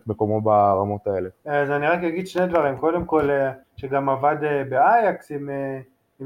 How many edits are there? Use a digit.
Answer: 1